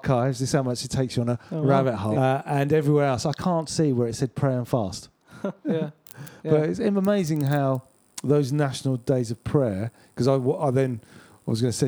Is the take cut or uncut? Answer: cut